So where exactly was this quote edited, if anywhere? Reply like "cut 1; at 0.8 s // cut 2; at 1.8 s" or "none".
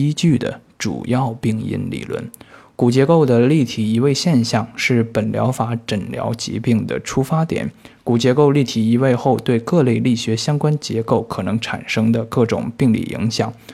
none